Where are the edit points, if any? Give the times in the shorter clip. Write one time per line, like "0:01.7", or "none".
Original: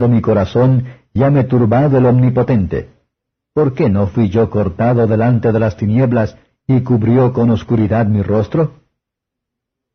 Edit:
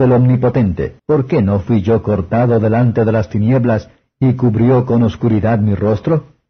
0:01.0